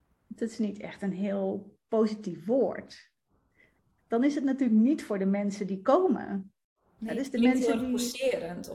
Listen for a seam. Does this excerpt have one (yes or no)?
yes